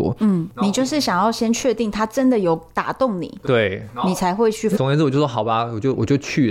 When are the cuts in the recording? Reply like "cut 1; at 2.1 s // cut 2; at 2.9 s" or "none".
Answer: cut 1; at 4.8 s

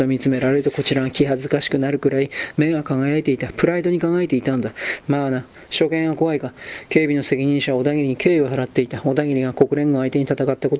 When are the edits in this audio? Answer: cut 1; at 5.0 s

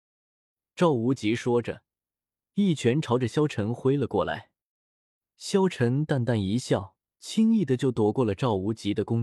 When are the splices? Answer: cut 1; at 7.1 s

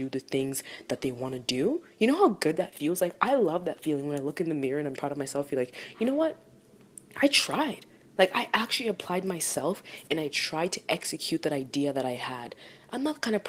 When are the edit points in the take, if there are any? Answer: cut 1; at 5.0 s

